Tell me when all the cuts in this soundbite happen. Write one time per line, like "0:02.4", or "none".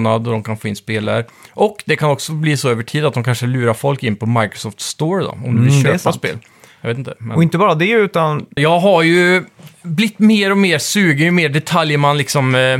0:08.6